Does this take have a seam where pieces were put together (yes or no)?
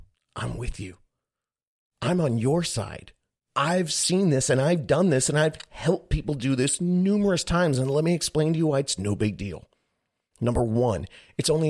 no